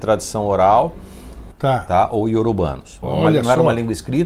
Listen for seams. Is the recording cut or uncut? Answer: cut